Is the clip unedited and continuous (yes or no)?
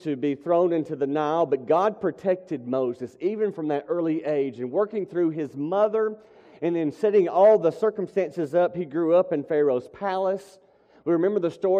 yes